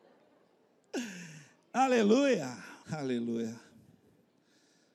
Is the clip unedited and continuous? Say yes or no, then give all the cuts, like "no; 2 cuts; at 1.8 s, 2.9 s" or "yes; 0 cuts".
no; 1 cut; at 2.8 s